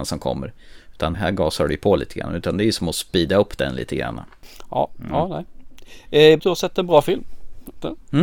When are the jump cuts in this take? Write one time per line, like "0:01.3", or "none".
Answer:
0:01.1
0:06.4